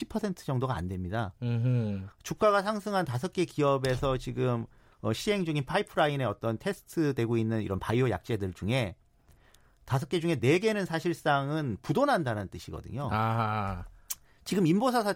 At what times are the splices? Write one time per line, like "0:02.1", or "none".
0:02.1